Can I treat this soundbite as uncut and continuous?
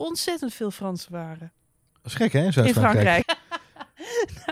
no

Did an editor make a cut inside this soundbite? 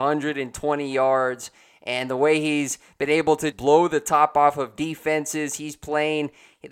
yes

